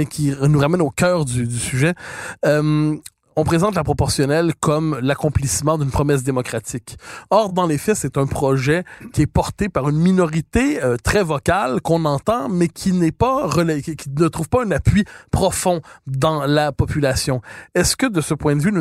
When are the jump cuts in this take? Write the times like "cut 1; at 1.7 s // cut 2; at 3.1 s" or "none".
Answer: none